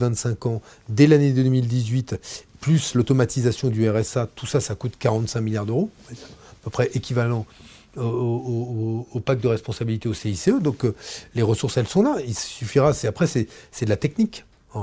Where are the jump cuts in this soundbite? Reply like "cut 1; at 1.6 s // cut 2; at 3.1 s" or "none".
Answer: none